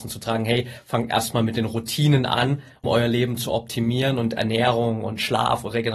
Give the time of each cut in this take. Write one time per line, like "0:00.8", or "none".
0:02.8